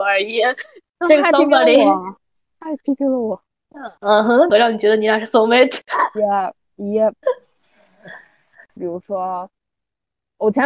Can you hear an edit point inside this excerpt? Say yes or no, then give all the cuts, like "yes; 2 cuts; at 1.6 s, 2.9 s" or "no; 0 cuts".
yes; 2 cuts; at 4.5 s, 8.8 s